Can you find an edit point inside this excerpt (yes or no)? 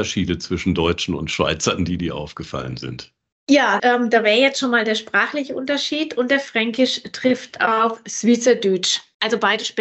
yes